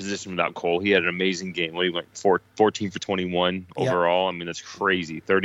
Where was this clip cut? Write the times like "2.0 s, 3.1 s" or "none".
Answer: none